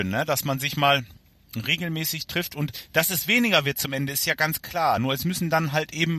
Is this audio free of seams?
yes; 0 cuts

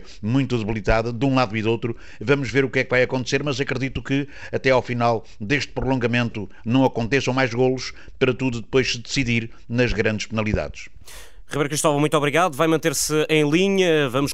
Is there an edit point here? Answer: no; 0 cuts

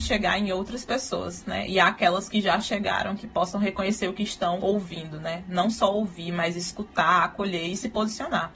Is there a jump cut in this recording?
no; 0 cuts

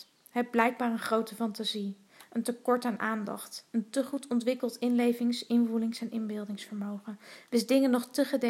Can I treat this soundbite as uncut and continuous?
yes; 0 cuts

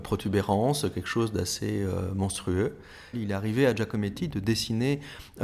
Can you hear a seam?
yes; 1 cut; at 3.1 s

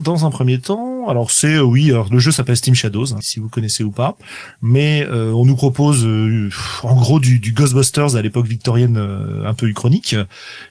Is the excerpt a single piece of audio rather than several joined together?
no; 1 cut; at 3.2 s

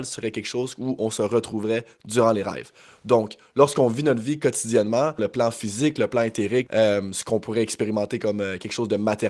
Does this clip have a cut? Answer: yes; 2 cuts; at 5.2 s, 6.7 s

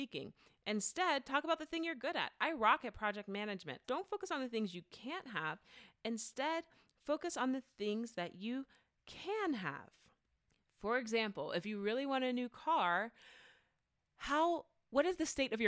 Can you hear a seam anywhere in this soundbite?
yes; 1 cut; at 3.8 s

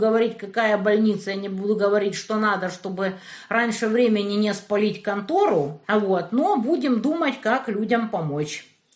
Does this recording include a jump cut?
yes; 1 cut; at 5.8 s

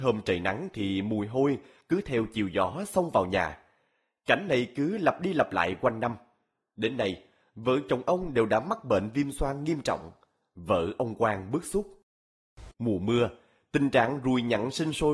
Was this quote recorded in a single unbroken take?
no; 1 cut; at 12.7 s

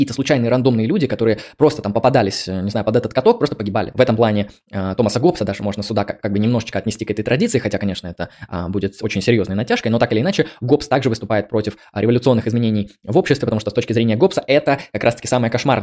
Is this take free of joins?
no; 1 cut; at 3.9 s

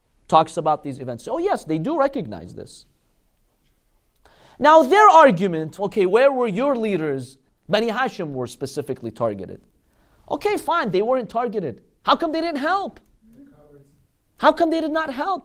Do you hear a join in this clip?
yes; 2 cuts; at 5.8 s, 7.5 s

